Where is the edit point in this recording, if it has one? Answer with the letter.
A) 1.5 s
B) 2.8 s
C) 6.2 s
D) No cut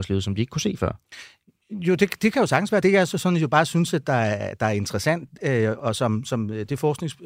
B